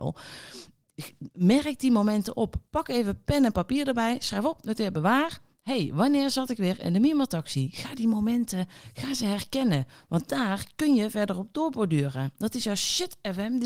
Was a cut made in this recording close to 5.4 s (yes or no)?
no